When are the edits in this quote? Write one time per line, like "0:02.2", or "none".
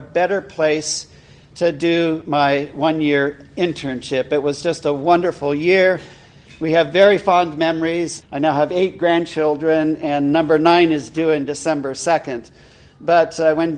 0:08.2